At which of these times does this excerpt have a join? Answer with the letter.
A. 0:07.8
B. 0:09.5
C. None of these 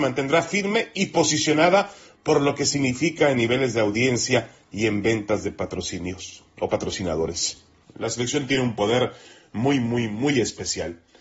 A